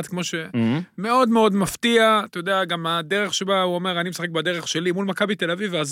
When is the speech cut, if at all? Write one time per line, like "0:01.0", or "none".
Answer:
none